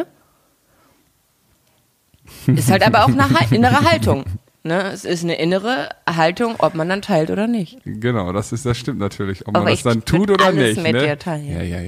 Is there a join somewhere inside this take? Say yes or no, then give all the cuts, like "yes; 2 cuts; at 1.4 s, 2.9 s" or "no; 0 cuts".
no; 0 cuts